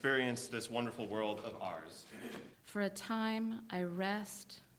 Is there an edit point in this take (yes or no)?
yes